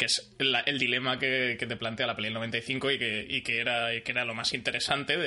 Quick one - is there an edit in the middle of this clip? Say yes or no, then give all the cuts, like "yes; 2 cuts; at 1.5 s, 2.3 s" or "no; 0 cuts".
no; 0 cuts